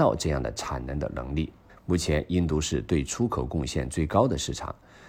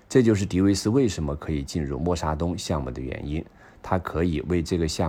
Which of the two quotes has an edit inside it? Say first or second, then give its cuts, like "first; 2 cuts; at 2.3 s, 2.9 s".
first; 1 cut; at 1.7 s